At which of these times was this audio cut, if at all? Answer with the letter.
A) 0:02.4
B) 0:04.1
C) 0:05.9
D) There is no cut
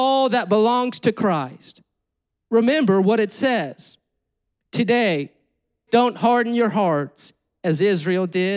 C